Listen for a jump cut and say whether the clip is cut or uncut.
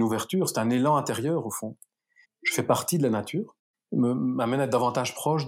cut